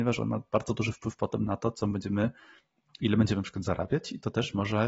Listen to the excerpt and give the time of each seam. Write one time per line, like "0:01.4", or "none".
none